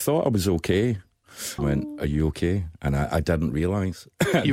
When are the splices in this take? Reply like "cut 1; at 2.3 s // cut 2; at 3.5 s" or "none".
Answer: cut 1; at 1.6 s